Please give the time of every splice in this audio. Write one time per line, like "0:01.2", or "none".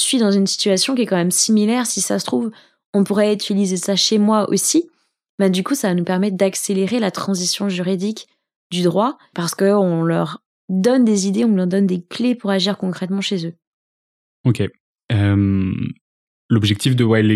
0:09.3

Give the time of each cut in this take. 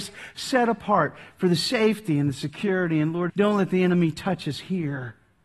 0:03.3

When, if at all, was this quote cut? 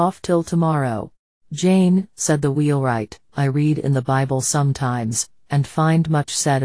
0:01.4
0:03.3

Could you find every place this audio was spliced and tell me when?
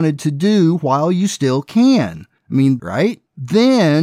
0:02.8

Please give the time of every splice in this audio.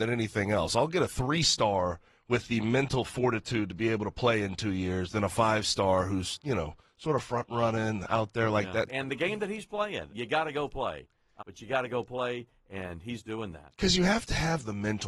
0:08.9
0:10.1
0:11.4

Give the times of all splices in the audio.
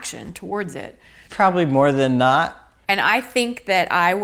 0:01.3
0:02.8

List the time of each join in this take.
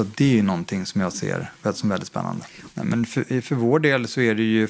0:02.7

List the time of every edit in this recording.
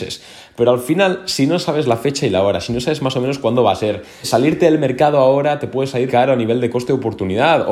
0:04.2
0:06.1

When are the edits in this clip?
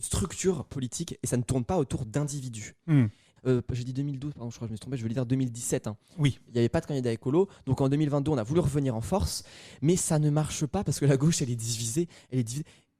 0:03.4

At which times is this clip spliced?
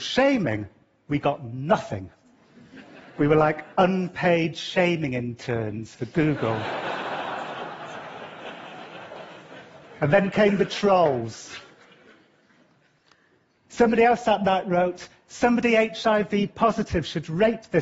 none

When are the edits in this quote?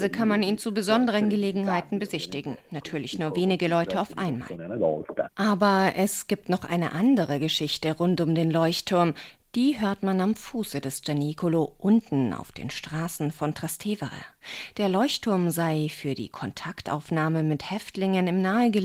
none

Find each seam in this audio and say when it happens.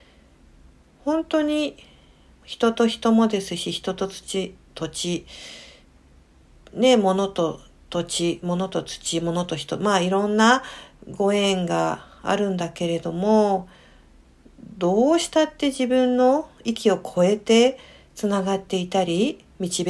none

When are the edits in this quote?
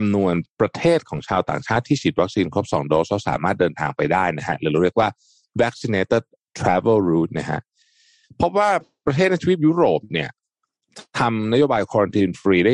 none

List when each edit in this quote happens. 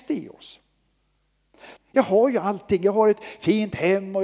0:01.8

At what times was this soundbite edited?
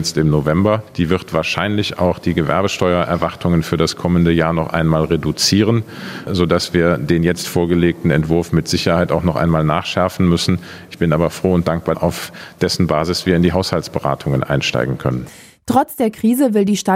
0:11.9

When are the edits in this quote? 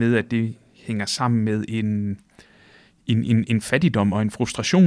none

